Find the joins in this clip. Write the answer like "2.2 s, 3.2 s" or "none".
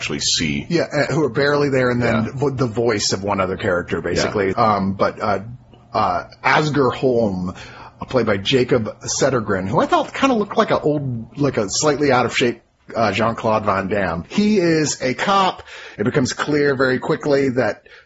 4.5 s, 14.2 s, 16.0 s